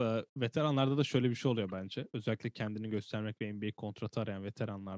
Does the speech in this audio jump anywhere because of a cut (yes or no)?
no